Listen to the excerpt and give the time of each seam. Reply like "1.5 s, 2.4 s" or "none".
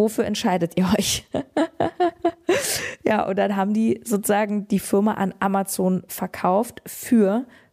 none

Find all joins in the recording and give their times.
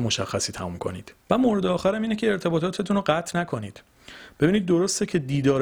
1.2 s

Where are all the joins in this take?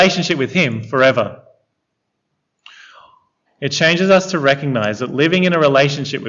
3.5 s

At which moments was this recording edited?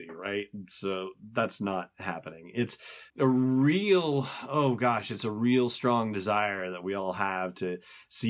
3.1 s

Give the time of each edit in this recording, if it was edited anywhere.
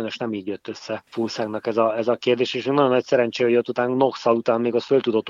1.1 s

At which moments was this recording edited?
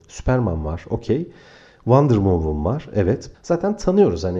3.3 s

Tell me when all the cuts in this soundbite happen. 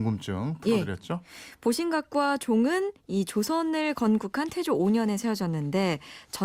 none

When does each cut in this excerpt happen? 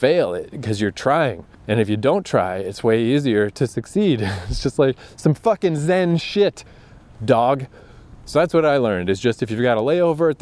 1.5 s

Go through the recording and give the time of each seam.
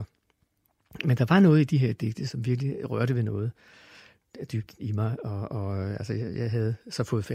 none

